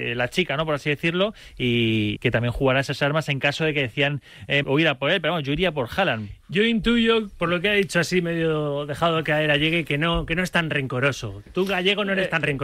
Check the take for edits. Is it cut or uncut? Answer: cut